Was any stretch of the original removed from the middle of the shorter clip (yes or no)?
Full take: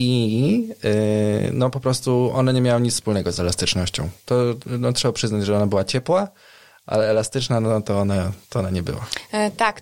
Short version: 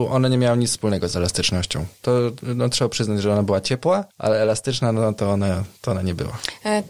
yes